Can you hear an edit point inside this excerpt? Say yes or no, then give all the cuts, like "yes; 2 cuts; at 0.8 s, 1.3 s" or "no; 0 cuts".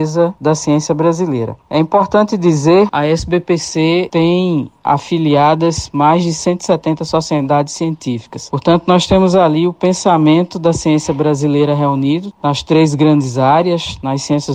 yes; 1 cut; at 2.9 s